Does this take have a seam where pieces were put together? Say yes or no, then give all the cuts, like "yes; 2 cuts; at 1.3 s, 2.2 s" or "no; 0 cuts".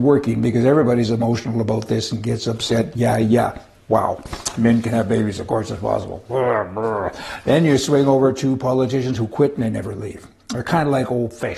no; 0 cuts